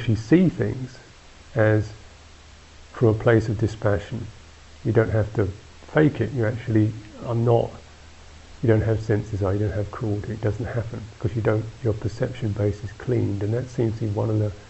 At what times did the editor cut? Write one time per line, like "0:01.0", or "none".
none